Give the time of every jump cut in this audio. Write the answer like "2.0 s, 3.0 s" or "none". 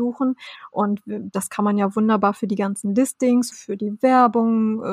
3.5 s